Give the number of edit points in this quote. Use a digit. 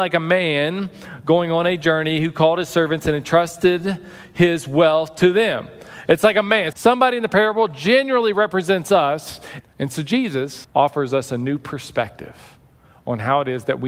3